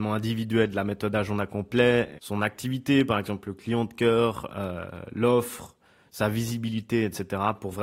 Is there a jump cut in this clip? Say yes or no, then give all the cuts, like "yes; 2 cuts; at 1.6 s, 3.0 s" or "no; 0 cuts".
yes; 1 cut; at 2.2 s